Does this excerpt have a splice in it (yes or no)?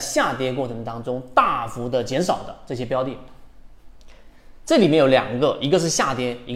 no